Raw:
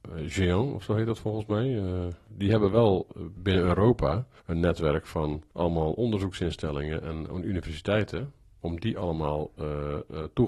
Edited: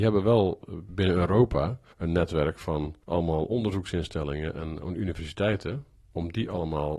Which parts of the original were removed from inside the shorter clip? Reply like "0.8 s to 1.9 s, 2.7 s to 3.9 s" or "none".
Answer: none